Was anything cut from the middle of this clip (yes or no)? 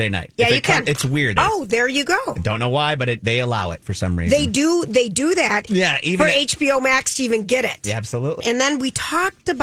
yes